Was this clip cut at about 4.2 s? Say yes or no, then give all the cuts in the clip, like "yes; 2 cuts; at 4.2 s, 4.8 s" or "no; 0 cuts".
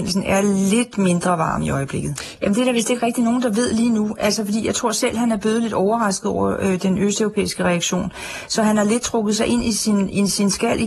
no; 1 cut; at 2.4 s